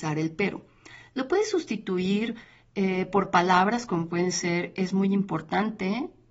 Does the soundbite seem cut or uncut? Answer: uncut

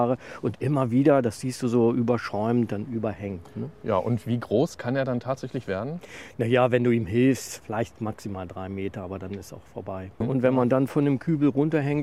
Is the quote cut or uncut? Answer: cut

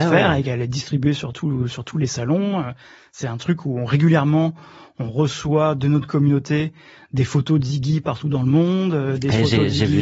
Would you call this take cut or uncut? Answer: uncut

